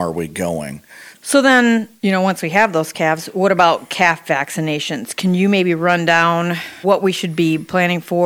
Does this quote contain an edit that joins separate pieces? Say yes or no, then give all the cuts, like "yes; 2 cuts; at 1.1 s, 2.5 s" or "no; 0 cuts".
yes; 1 cut; at 1.1 s